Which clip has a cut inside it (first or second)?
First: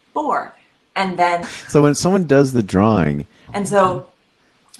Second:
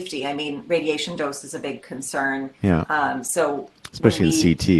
first